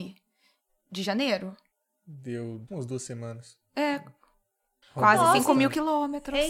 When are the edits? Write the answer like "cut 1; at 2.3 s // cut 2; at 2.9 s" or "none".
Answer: cut 1; at 2.7 s // cut 2; at 4.8 s